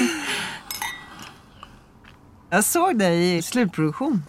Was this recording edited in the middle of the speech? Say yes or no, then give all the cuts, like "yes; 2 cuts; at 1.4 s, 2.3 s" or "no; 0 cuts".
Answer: yes; 1 cut; at 3.4 s